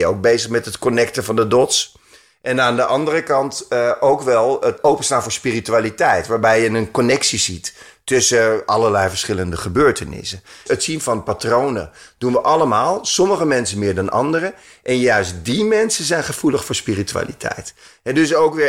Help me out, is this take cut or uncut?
uncut